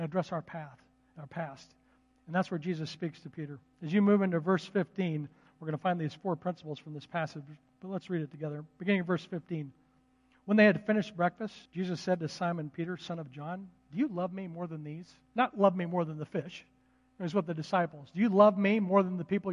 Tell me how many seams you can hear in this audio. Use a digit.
1